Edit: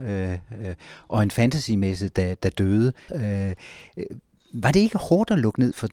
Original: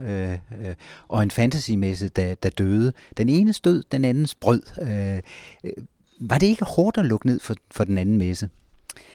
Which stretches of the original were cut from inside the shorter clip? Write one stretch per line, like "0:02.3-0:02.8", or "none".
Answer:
0:03.1-0:04.8